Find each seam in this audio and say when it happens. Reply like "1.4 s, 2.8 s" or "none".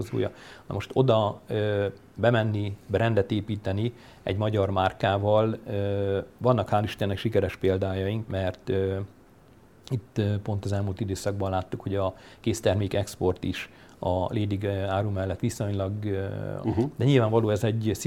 8.3 s, 16.6 s